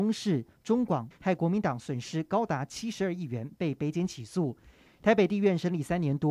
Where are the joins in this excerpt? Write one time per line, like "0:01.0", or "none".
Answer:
0:01.1